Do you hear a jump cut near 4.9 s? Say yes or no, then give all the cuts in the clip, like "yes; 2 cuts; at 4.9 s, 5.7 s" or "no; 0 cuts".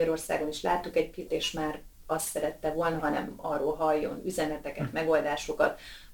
no; 2 cuts; at 1.3 s, 3.0 s